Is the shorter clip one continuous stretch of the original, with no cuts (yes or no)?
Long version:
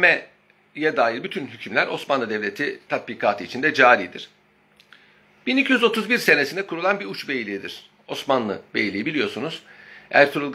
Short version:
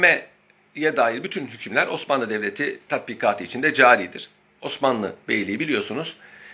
no